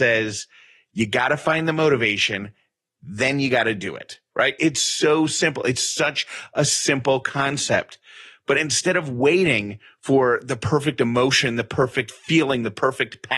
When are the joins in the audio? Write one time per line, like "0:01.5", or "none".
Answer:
0:04.6